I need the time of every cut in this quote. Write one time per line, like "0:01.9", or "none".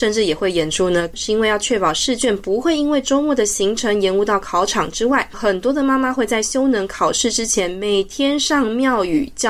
0:01.1
0:05.3

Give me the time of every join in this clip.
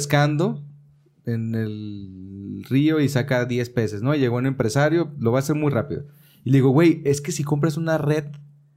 none

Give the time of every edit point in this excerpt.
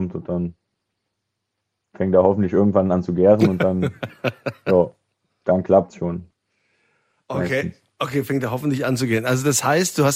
none

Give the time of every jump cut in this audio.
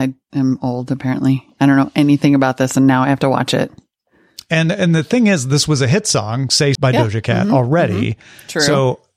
0:06.8

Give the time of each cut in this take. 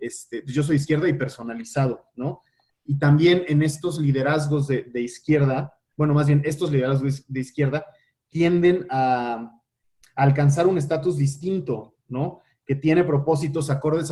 none

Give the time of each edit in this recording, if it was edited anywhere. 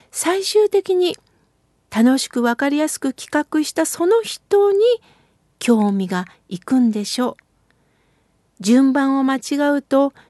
none

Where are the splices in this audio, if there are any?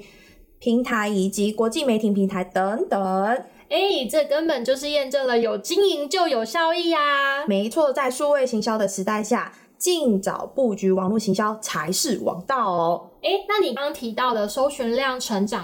0:13.8

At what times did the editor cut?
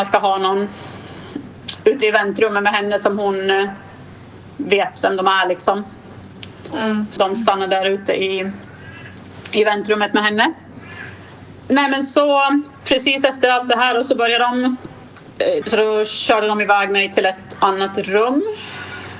0:07.2
0:15.6

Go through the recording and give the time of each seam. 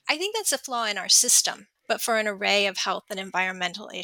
0:01.8

